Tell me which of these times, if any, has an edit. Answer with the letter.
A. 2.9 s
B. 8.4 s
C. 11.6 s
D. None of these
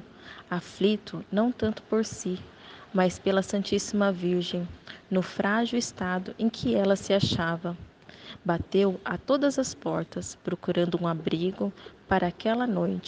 D